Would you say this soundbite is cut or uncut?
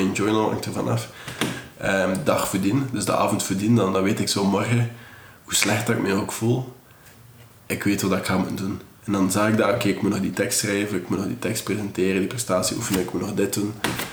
uncut